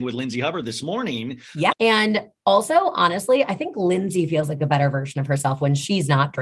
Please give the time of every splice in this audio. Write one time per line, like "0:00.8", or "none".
0:01.7